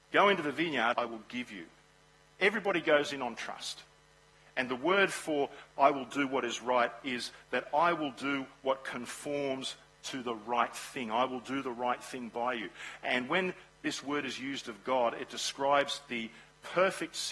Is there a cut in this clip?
yes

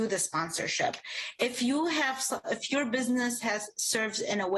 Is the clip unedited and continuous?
yes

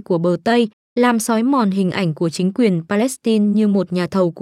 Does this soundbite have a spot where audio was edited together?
no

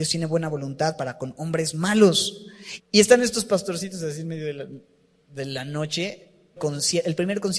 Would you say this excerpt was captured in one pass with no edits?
no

